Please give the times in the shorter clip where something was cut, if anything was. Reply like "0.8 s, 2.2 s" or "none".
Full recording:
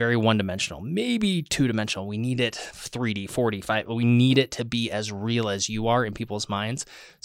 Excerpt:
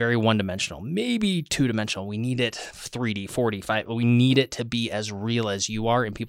none